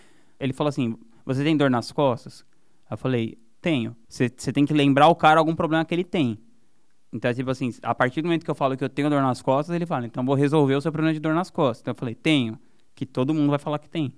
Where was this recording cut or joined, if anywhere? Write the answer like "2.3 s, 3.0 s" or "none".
4.0 s